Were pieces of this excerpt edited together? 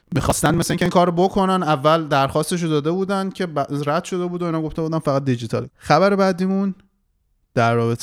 no; 0 cuts

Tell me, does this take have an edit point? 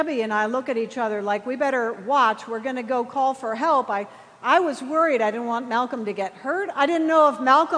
yes; 1 cut; at 6.7 s

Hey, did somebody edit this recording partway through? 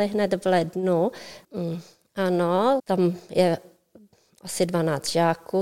yes; 2 cuts; at 1.4 s, 2.8 s

